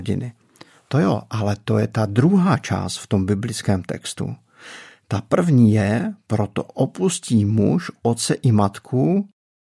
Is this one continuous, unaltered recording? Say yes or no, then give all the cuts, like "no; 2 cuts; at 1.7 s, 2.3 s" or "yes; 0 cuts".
yes; 0 cuts